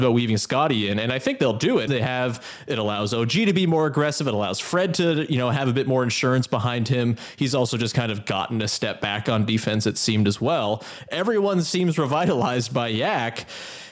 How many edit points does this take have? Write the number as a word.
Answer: one